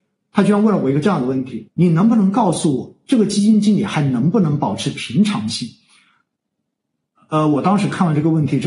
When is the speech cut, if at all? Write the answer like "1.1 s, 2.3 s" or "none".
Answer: 1.7 s